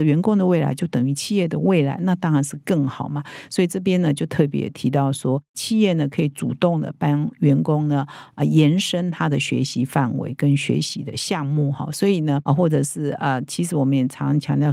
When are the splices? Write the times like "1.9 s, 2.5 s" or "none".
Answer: 12.5 s